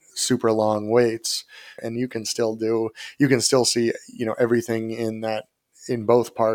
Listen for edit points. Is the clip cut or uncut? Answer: cut